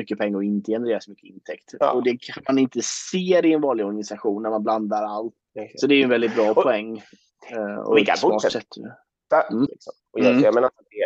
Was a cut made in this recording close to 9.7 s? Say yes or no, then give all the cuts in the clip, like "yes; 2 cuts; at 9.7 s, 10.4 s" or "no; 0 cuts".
yes; 2 cuts; at 5.5 s, 9.7 s